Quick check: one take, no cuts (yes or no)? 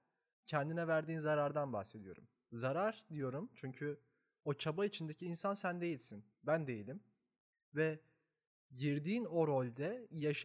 yes